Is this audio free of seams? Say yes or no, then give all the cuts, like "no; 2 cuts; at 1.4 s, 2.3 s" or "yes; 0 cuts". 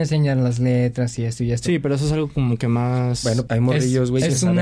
no; 1 cut; at 3.5 s